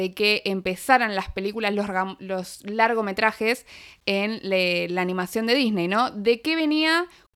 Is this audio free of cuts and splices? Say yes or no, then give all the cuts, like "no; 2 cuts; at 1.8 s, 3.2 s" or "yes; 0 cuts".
yes; 0 cuts